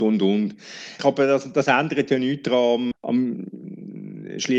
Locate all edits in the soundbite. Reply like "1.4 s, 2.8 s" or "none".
1.0 s, 2.9 s